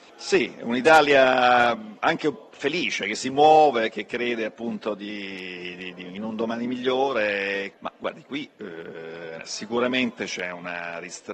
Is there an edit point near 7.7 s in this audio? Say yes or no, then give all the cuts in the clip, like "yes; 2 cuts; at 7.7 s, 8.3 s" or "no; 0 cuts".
yes; 2 cuts; at 7.7 s, 9.4 s